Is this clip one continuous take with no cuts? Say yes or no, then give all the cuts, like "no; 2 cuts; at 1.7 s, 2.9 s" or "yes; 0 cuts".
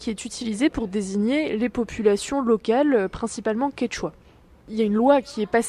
yes; 0 cuts